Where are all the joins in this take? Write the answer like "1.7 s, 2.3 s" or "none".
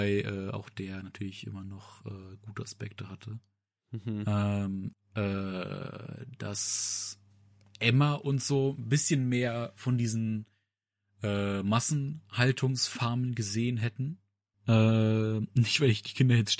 4.9 s, 14.5 s